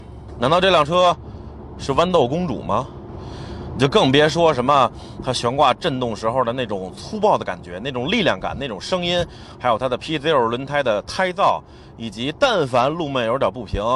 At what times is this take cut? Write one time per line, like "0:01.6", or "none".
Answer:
none